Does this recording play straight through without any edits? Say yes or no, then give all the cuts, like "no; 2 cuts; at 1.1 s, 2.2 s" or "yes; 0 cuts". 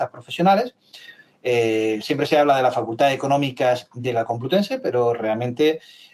yes; 0 cuts